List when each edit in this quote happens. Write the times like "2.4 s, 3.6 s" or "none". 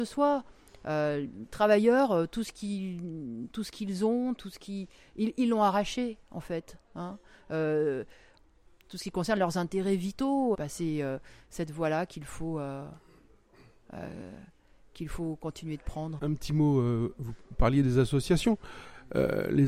10.5 s, 16.2 s